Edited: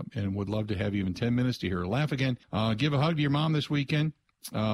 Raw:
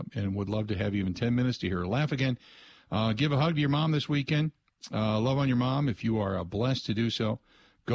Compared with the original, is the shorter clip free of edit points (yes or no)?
no